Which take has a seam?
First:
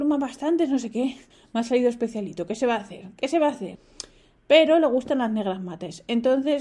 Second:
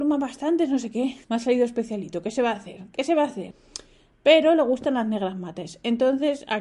second; 1 cut; at 1.2 s

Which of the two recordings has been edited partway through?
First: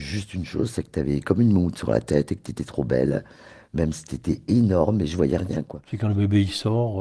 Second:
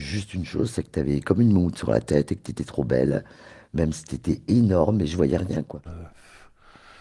second; 1 cut; at 5.8 s

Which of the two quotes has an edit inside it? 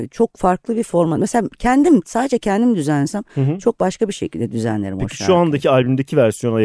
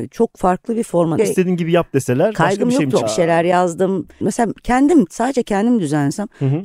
second; 3 cuts; at 1.2 s, 3.0 s, 4.2 s

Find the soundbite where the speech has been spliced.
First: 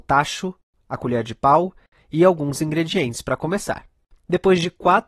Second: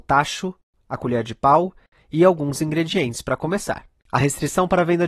second; 1 cut; at 4.0 s

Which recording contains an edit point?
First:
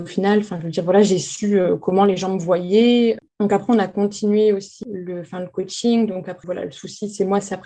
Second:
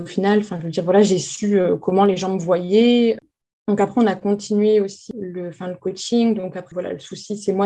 first; 1 cut; at 3.3 s

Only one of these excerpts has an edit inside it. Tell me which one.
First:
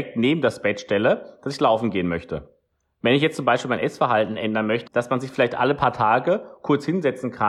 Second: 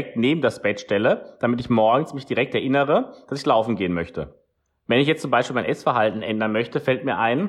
first; 2 cuts; at 1.4 s, 4.9 s

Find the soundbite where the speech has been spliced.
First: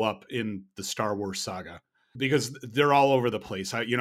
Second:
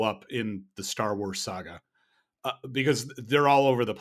first; 1 cut; at 2.1 s

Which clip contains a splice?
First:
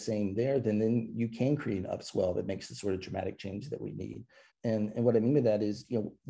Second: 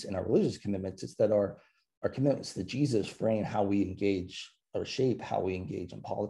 first; 1 cut; at 4.5 s

